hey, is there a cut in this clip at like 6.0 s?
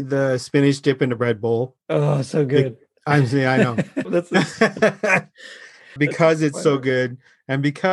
yes; 2 cuts; at 4.0 s, 6.0 s

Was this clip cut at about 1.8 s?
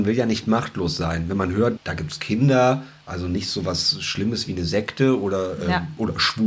yes; 1 cut; at 1.8 s

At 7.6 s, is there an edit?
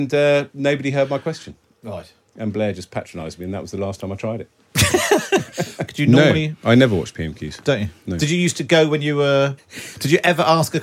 no; 2 cuts; at 5.9 s, 9.6 s

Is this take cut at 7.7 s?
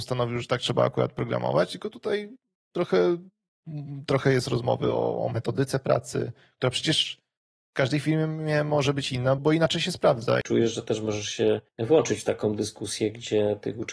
no; 3 cuts; at 9.4 s, 10.4 s, 11.7 s

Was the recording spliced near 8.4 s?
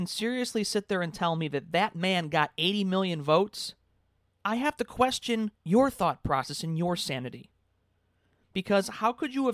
no; 2 cuts; at 4.3 s, 5.5 s

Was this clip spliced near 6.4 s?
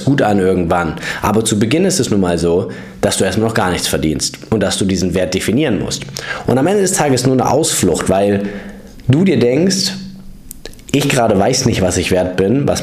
yes; 1 cut; at 6.4 s

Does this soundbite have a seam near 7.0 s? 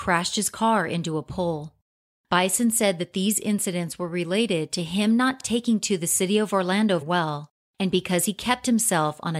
yes; 1 cut; at 7.0 s

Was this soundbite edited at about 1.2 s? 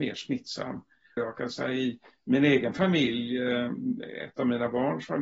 yes; 1 cut; at 1.2 s

